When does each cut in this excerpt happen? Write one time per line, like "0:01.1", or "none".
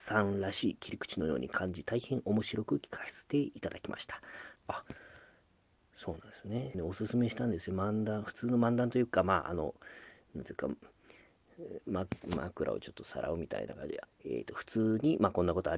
0:04.6
0:06.7
0:14.0